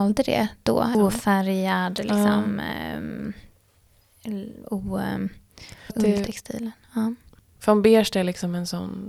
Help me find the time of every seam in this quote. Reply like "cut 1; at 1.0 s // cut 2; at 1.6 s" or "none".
cut 1; at 0.9 s // cut 2; at 5.9 s // cut 3; at 7.6 s